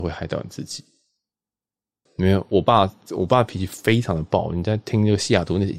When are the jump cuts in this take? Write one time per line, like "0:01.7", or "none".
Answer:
0:02.1